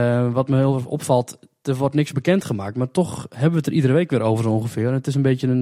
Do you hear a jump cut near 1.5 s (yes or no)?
no